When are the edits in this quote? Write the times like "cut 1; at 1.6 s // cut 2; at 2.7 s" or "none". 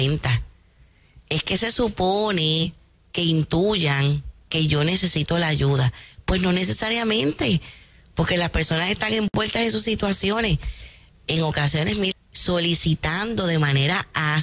cut 1; at 12.1 s